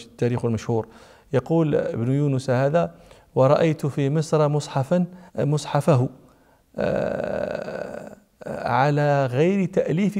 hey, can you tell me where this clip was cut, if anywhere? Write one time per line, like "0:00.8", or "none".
0:05.3